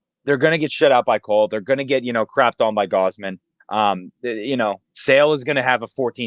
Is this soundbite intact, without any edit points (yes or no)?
yes